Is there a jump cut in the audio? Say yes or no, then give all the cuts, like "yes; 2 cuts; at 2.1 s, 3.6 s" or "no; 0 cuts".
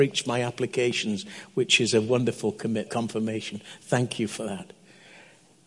yes; 1 cut; at 2.9 s